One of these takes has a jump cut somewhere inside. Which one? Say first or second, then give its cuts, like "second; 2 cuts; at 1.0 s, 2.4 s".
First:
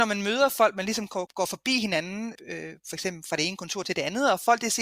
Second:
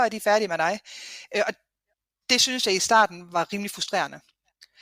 first; 2 cuts; at 1.3 s, 2.4 s